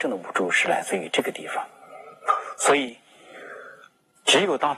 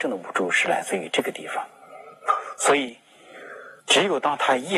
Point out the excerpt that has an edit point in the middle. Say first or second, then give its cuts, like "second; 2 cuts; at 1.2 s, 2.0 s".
second; 1 cut; at 3.8 s